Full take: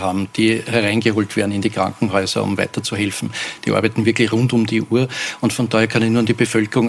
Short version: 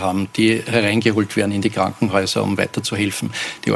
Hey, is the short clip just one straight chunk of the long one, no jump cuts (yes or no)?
yes